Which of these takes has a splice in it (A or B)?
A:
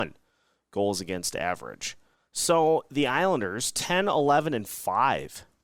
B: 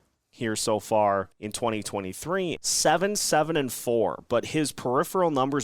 B